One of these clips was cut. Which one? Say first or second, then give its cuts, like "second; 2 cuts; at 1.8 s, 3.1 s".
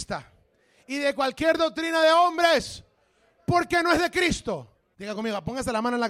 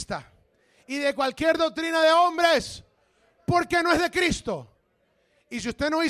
first; 1 cut; at 4.9 s